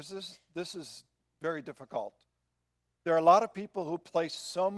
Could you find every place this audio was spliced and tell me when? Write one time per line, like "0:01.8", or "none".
none